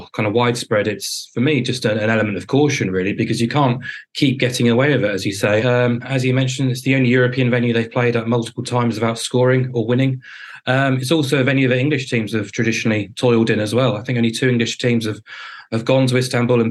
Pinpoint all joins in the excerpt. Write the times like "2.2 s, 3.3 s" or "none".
5.6 s